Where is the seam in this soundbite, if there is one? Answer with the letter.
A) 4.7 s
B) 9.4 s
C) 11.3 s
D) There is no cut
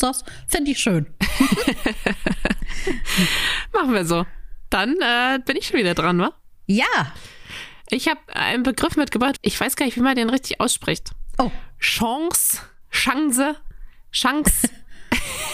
B